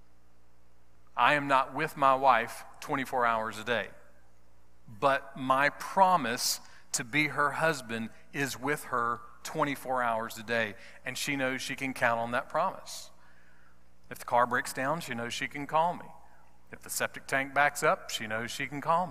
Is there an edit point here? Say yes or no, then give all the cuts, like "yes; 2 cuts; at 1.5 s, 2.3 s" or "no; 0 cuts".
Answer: no; 0 cuts